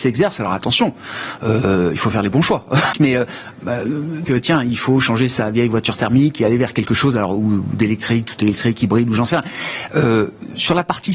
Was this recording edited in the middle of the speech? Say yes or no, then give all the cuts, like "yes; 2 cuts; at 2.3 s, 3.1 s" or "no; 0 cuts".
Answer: yes; 2 cuts; at 2.9 s, 4.3 s